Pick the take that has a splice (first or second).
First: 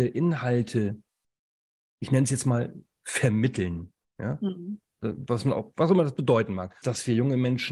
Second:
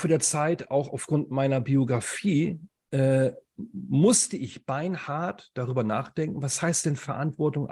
first